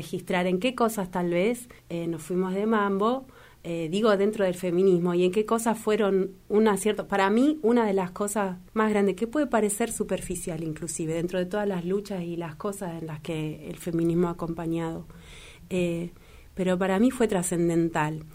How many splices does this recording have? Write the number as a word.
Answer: two